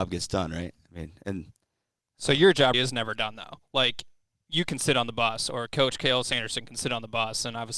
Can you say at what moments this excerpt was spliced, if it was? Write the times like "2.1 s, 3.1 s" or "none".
2.7 s